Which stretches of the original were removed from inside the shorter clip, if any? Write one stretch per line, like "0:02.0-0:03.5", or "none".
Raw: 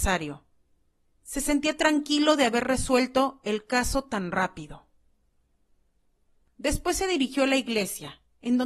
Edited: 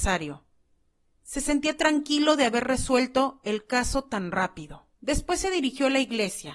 0:04.9-0:06.5